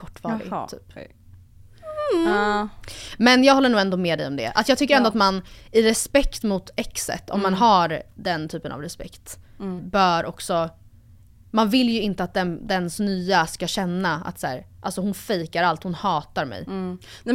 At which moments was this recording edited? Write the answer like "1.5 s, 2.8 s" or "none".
9.8 s